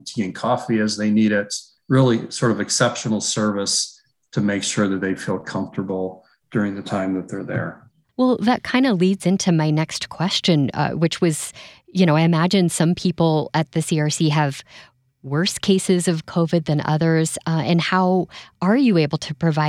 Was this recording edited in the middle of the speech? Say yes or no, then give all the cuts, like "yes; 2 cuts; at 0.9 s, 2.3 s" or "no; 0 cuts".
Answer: no; 0 cuts